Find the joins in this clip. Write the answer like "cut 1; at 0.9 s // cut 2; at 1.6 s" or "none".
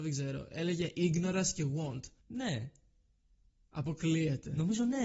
cut 1; at 2.2 s